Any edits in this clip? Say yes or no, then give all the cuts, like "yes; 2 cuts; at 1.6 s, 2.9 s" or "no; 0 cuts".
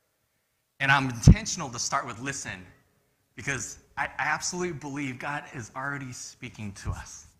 no; 0 cuts